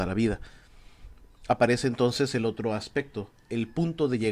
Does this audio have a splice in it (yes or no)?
no